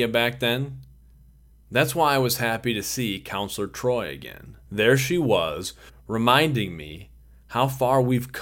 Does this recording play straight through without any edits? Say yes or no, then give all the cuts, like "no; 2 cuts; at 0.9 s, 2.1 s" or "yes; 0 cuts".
no; 3 cuts; at 1.5 s, 4.6 s, 5.9 s